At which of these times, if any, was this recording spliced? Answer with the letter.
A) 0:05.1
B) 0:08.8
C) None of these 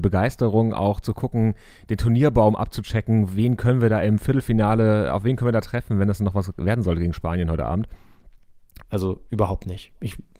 B